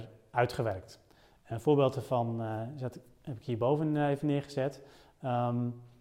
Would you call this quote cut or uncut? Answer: uncut